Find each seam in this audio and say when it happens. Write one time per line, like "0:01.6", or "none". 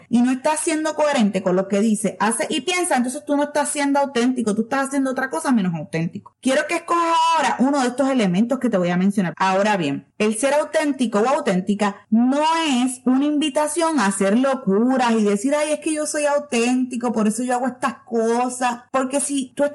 0:09.3

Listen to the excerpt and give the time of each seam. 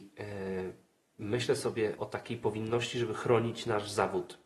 0:02.0

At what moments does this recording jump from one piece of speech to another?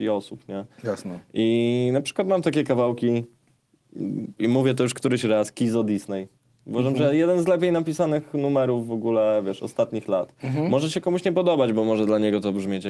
none

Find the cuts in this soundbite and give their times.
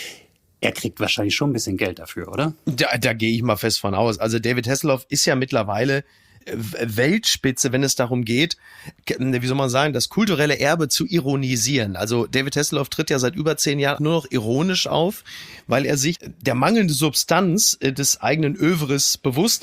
0:14.0
0:16.1

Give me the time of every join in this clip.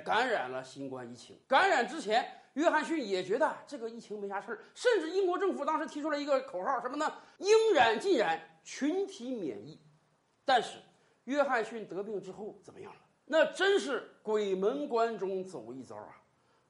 none

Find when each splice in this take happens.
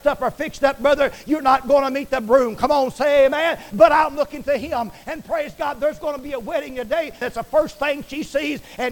0:03.7
0:07.2

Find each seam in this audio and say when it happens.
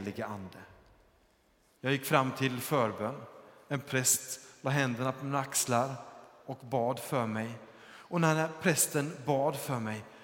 0:01.7

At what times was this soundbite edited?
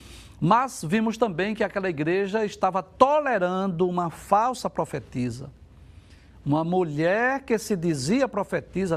none

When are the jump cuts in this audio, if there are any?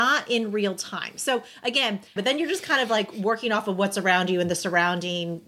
0:02.2

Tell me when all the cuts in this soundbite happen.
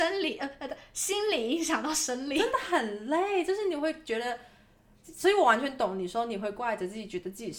none

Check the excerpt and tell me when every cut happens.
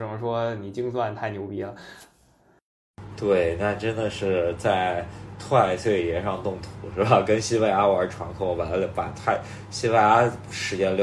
none

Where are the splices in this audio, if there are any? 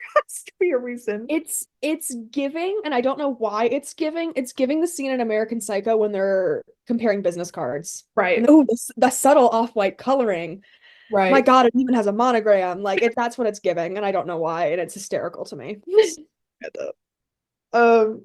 0:08.4
0:13.1

